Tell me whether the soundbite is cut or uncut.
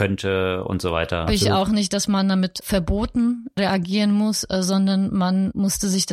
cut